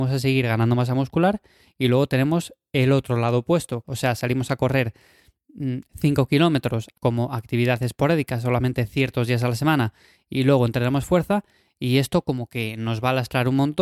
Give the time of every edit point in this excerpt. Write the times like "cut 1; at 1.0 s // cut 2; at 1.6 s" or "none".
cut 1; at 3.8 s